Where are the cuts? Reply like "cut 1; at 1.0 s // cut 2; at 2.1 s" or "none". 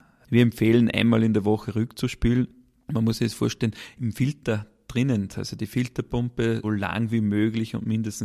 cut 1; at 5.3 s // cut 2; at 6.6 s